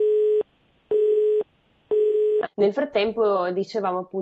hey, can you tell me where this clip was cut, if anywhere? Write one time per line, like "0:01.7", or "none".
0:02.4